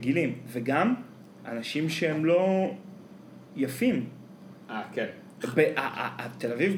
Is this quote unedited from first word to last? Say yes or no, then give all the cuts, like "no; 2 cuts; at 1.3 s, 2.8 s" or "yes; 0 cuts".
yes; 0 cuts